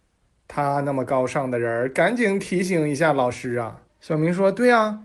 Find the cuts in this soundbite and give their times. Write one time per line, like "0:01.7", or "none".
0:03.9